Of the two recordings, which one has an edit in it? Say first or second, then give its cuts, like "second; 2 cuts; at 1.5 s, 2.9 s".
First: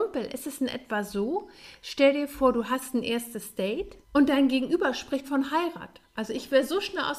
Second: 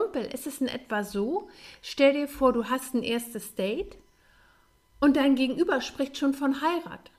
first; 2 cuts; at 4.0 s, 5.2 s